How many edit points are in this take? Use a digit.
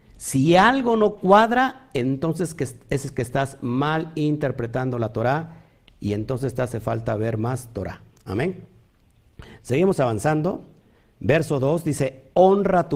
0